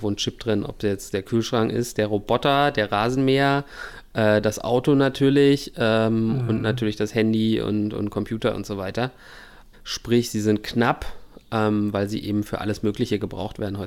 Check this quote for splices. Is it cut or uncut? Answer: cut